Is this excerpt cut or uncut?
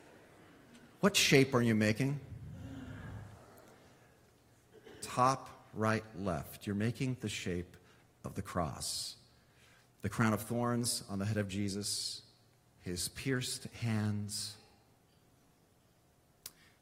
uncut